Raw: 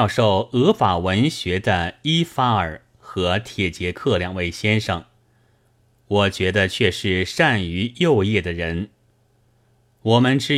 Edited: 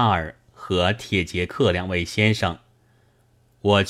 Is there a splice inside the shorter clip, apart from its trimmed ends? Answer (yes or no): no